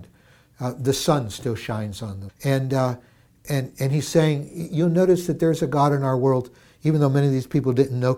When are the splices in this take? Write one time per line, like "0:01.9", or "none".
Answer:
0:02.3